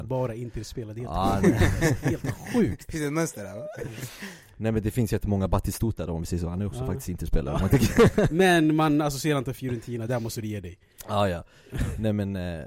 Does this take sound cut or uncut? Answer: uncut